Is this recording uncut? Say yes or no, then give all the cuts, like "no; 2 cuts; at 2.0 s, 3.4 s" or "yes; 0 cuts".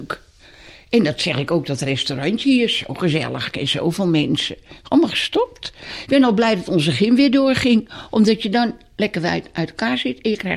yes; 0 cuts